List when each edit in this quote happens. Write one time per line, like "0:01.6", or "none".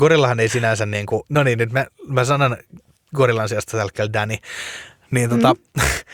0:01.3